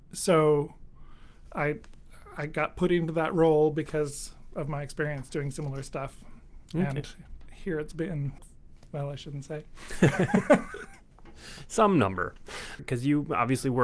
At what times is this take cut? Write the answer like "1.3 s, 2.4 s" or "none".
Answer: 8.4 s, 12.8 s